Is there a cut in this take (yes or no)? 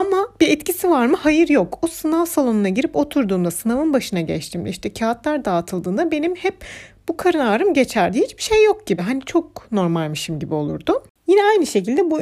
no